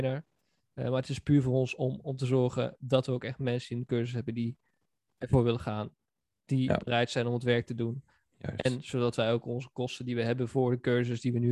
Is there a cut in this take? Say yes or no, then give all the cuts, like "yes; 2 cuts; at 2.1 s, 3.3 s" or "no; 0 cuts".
no; 0 cuts